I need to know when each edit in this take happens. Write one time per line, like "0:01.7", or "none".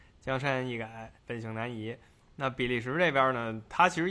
0:01.2

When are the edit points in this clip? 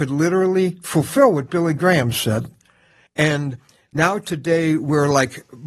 0:03.1

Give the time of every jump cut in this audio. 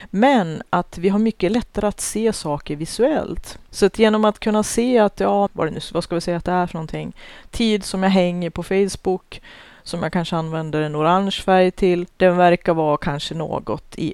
0:03.7
0:05.5

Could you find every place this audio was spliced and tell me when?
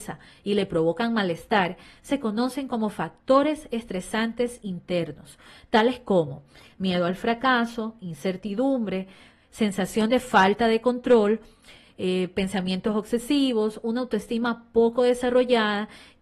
none

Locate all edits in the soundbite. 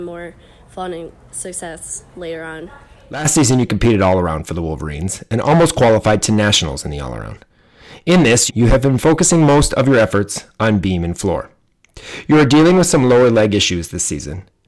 0:08.5

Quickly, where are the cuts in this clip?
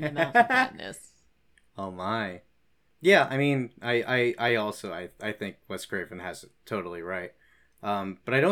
none

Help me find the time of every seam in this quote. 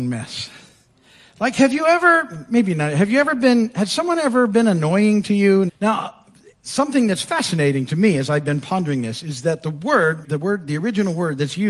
0:05.7
0:10.2

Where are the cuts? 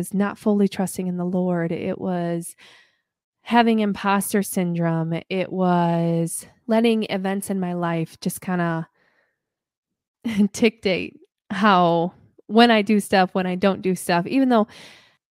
0:06.6

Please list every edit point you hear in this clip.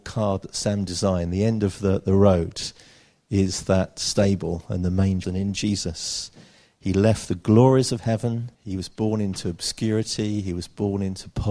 0:05.2
0:08.5

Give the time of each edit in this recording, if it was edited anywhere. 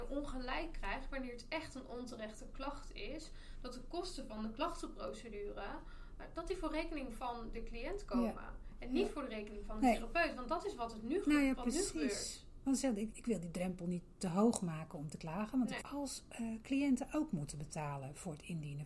0:13.1
0:15.8

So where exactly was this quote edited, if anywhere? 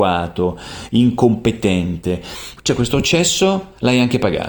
0:02.6

